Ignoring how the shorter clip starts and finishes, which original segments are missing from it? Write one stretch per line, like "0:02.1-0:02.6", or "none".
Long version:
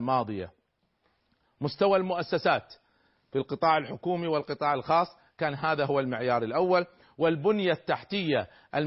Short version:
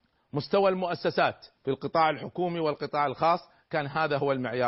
0:02.8-0:03.2